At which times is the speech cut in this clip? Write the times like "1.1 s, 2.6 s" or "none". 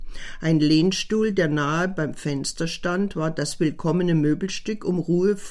none